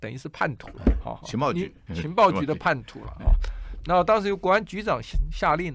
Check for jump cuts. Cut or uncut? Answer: cut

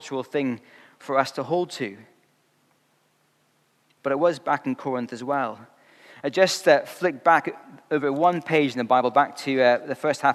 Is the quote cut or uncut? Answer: uncut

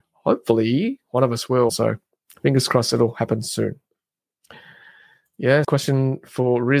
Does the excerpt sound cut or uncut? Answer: cut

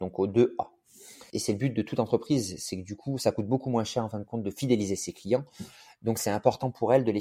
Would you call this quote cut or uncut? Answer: cut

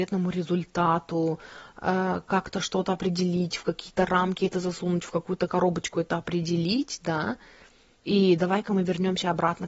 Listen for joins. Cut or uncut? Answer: cut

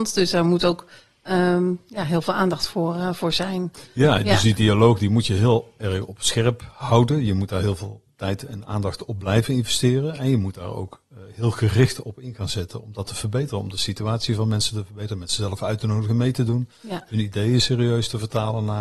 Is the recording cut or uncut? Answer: uncut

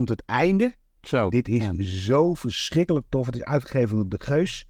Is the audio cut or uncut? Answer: cut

